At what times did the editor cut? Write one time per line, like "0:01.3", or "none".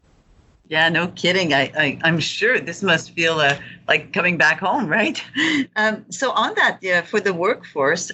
none